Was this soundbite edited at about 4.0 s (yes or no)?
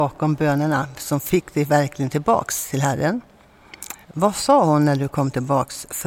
yes